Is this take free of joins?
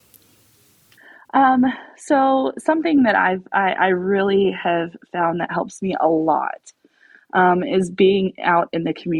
yes; 0 cuts

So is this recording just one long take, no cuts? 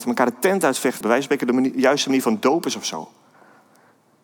no; 1 cut; at 1.0 s

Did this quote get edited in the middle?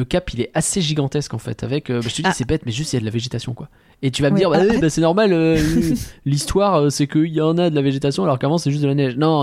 no; 0 cuts

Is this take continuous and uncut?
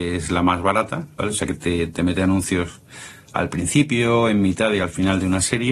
yes; 0 cuts

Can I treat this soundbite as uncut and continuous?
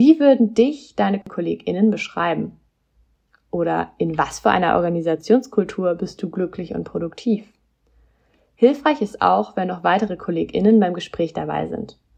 yes; 0 cuts

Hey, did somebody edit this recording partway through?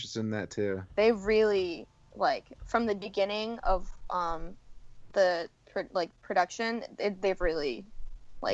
yes; 1 cut; at 0.9 s

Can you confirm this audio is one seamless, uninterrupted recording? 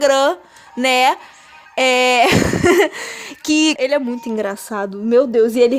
no; 1 cut; at 3.8 s

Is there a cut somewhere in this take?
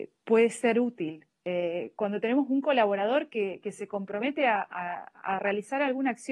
no; 0 cuts

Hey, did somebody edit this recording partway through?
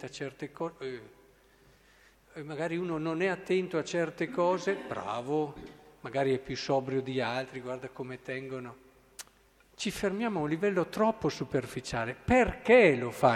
no; 0 cuts

